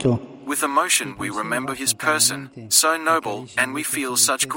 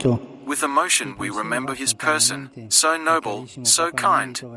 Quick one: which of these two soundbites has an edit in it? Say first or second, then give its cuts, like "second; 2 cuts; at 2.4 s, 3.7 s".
first; 1 cut; at 3.6 s